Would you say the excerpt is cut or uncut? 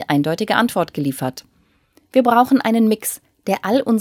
uncut